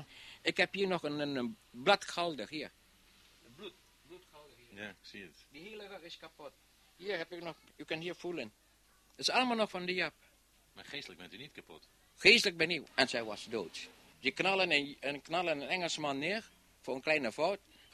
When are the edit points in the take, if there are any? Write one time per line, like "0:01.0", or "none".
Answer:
0:07.7
0:12.9
0:14.1